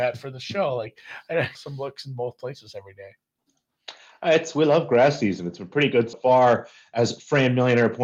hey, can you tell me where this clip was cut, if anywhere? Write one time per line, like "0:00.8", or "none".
0:01.5
0:06.1